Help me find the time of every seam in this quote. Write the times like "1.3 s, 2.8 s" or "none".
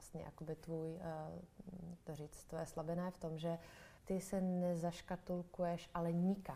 4.0 s